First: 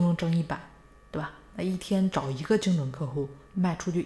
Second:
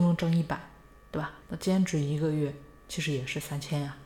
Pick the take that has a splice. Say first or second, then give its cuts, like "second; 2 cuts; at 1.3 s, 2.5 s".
second; 1 cut; at 1.4 s